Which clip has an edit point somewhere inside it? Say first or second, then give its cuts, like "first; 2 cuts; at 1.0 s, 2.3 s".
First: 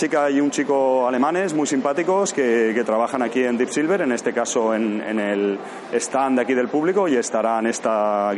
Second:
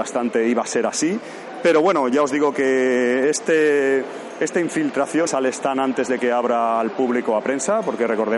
second; 1 cut; at 5.3 s